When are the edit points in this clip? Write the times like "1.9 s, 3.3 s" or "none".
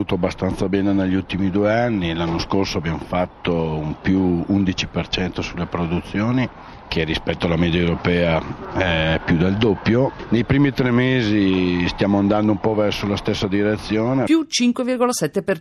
none